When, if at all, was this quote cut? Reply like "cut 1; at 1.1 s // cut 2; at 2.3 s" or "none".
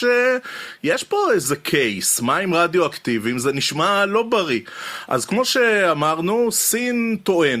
cut 1; at 5.1 s